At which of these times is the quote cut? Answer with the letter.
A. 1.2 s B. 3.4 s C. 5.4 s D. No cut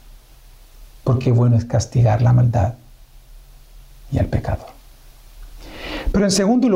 D